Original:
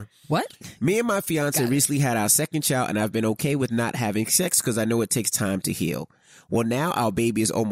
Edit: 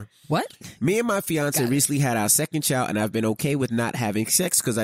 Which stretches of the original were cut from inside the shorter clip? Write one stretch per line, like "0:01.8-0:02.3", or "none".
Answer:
none